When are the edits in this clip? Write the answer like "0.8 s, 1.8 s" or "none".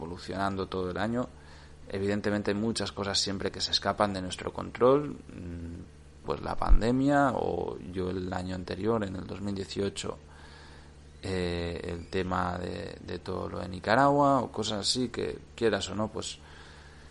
6.2 s

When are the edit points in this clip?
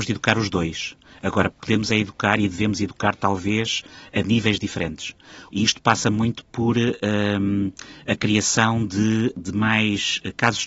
5.5 s

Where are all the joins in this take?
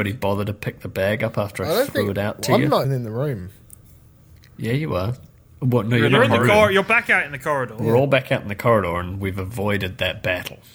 2.8 s

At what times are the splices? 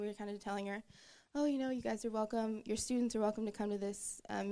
none

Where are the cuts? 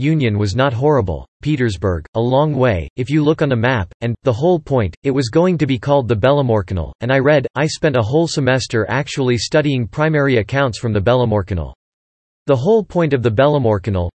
1.4 s

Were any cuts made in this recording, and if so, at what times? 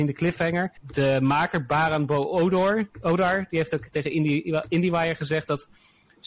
none

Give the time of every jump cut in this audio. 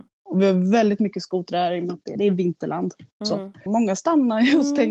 2.2 s, 3.7 s

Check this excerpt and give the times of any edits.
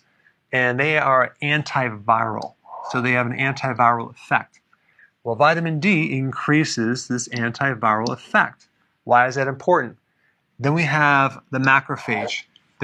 10.4 s

